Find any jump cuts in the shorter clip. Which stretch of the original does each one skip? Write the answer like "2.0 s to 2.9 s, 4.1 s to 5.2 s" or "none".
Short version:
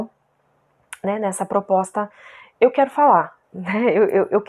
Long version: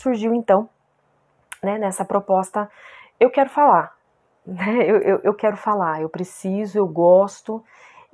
4.0 s to 4.4 s